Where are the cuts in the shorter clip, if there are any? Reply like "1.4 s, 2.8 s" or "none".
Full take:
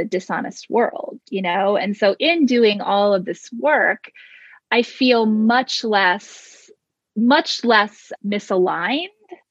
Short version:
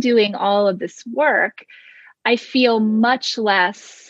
none

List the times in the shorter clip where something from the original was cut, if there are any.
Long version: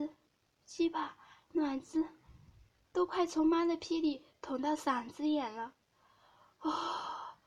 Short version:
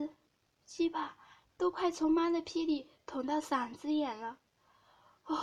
1.4 s

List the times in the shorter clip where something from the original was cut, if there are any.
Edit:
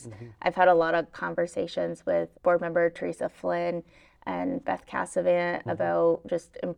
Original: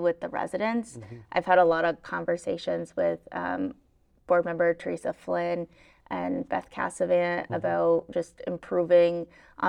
2.3 s

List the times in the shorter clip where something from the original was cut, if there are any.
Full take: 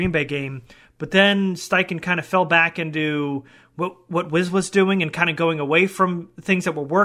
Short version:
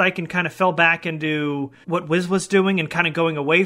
1.8 s

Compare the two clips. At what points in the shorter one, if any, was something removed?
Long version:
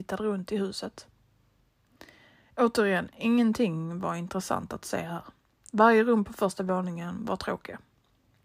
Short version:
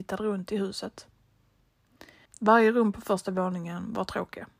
2.3 s

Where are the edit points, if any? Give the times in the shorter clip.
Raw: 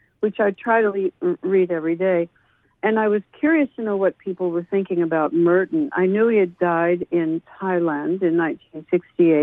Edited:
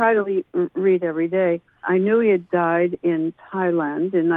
1.8 s

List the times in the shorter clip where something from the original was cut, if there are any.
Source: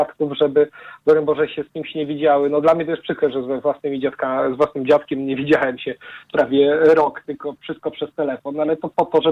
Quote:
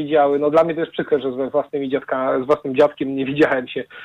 none

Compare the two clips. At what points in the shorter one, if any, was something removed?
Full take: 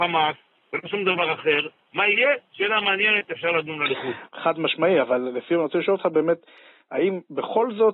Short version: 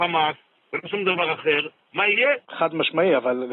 2.4 s

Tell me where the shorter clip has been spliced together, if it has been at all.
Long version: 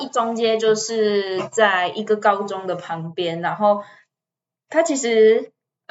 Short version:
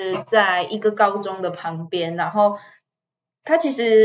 none

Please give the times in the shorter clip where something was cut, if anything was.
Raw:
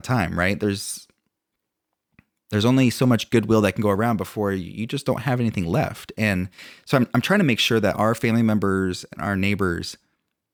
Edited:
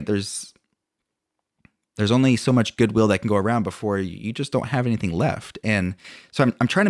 none

